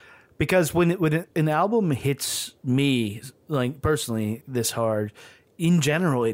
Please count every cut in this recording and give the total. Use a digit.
2